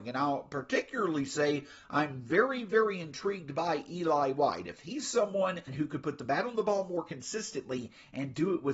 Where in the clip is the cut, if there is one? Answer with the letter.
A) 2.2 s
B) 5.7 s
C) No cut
B